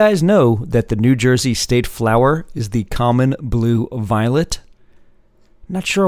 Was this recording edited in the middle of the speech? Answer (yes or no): no